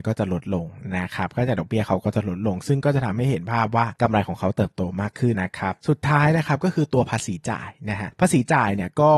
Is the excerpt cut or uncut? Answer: cut